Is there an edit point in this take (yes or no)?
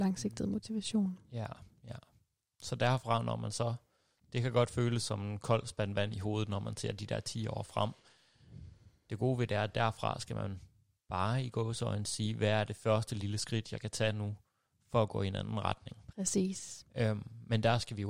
no